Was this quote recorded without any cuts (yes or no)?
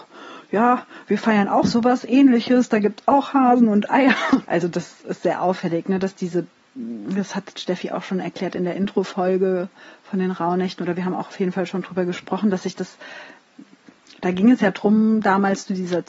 no